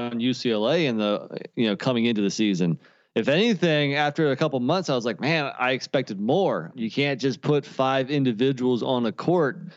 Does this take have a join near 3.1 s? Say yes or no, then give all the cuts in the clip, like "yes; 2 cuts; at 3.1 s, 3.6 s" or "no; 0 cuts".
no; 1 cut; at 6.7 s